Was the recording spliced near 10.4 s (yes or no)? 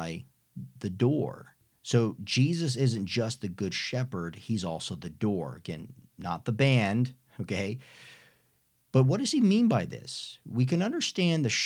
no